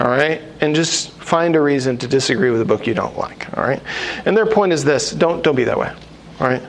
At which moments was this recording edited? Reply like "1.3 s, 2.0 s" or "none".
none